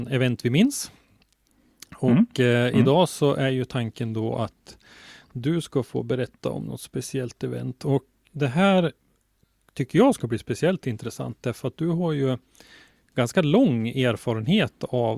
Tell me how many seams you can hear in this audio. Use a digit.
1